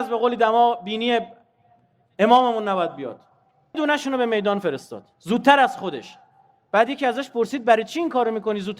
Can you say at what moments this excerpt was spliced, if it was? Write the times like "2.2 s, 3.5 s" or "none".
3.7 s